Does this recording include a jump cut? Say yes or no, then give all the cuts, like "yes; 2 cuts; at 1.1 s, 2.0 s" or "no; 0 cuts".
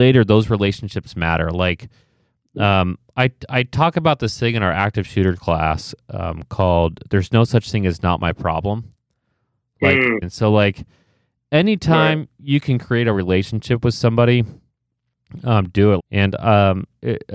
yes; 2 cuts; at 10.2 s, 16.0 s